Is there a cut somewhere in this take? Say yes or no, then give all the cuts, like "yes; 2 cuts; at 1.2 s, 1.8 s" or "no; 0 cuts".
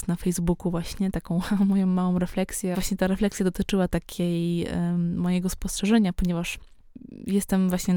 yes; 1 cut; at 2.7 s